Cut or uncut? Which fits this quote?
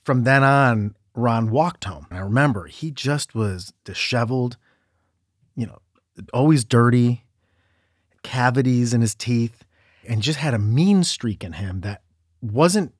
cut